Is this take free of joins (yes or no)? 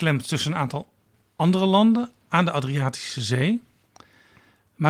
yes